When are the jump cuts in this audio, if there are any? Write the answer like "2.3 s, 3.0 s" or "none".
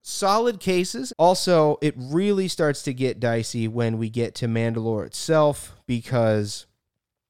1.1 s